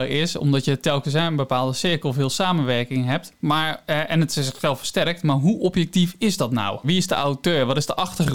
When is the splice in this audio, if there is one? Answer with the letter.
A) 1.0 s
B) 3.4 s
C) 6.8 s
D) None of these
C